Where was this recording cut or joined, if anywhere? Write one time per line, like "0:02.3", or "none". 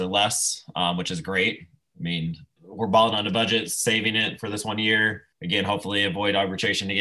0:02.6
0:05.3